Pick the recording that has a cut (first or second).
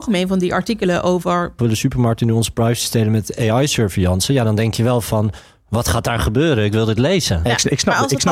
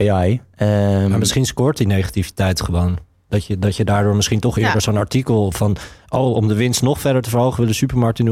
first